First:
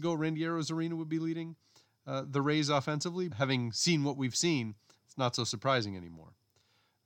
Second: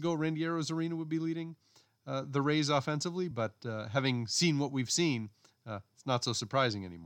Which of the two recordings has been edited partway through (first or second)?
first